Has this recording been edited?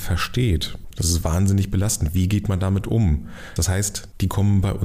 yes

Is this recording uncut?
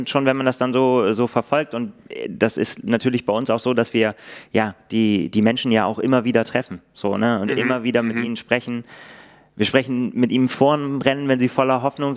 yes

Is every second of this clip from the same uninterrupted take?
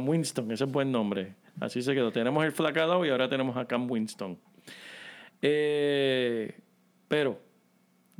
yes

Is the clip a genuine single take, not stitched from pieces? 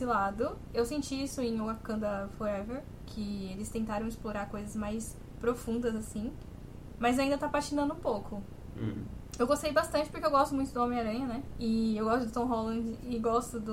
no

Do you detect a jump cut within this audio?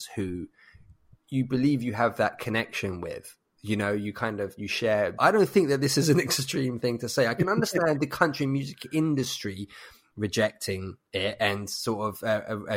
yes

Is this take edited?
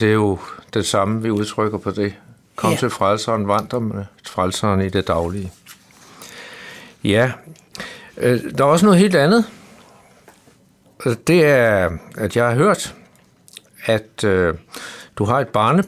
no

